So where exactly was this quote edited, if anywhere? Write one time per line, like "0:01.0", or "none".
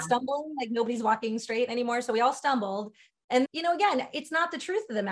0:03.5